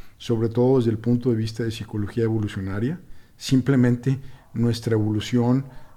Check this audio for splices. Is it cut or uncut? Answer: uncut